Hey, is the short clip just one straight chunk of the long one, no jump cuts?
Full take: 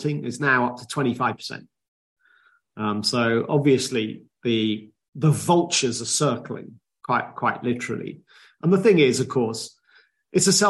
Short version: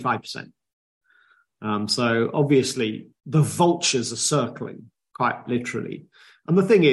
no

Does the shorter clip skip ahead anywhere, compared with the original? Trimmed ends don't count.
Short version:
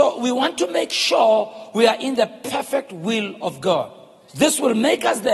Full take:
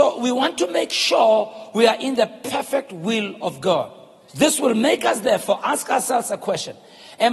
no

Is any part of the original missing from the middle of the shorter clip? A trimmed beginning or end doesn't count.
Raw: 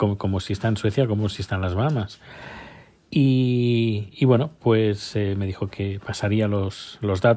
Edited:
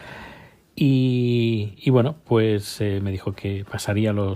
no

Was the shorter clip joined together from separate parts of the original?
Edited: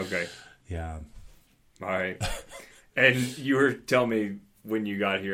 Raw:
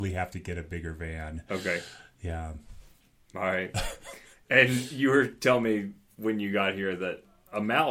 no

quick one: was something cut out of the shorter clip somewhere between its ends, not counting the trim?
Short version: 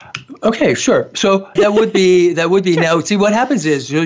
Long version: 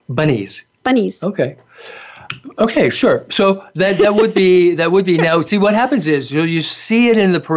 yes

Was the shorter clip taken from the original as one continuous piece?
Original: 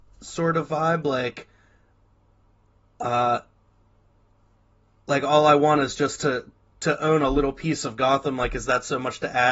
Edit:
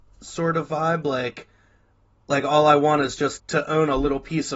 no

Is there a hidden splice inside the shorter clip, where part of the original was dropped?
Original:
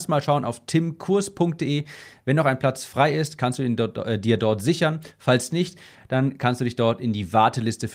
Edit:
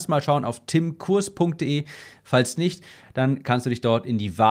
yes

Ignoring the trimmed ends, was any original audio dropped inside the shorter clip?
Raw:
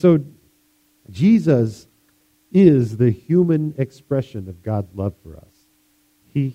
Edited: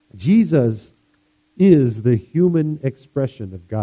no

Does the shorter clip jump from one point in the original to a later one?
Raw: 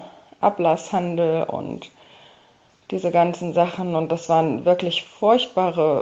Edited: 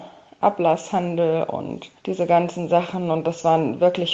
yes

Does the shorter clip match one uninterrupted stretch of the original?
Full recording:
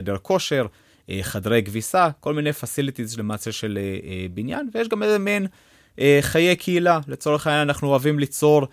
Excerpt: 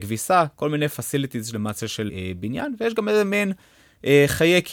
no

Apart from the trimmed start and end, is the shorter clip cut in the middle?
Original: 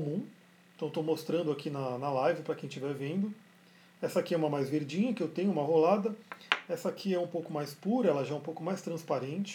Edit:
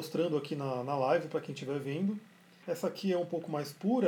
yes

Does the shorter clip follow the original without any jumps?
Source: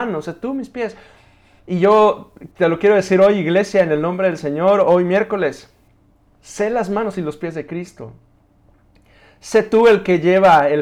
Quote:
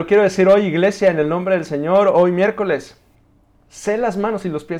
yes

